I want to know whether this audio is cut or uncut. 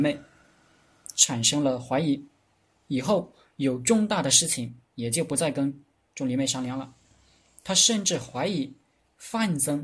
uncut